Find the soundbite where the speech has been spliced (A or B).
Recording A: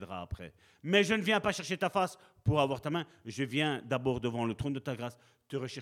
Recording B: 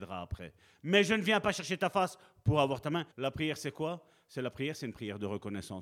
B